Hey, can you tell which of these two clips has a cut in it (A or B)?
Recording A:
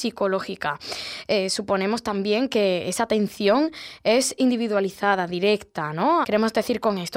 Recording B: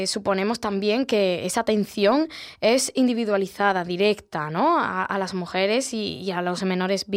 A